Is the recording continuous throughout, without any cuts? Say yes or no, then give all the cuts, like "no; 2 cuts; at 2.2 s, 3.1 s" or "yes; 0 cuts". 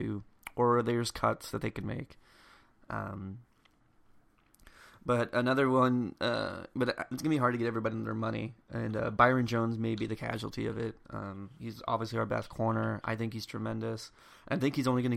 yes; 0 cuts